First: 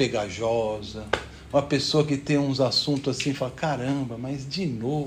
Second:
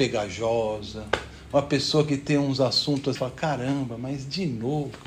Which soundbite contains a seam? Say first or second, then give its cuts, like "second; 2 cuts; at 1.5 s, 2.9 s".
second; 1 cut; at 3.2 s